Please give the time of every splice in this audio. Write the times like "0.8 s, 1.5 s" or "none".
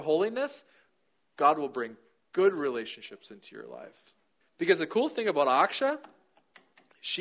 4.4 s